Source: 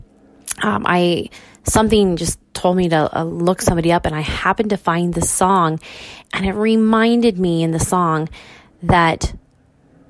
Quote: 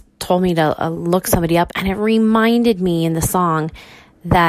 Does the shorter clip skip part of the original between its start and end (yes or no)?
yes